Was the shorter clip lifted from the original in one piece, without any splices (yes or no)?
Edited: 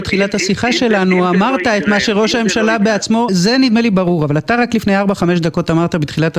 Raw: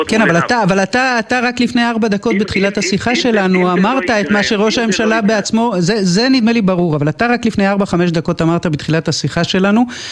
no